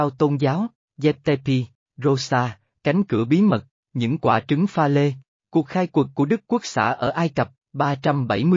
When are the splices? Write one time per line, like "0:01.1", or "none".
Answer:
0:07.6